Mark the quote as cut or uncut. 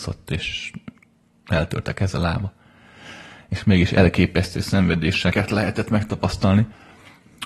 uncut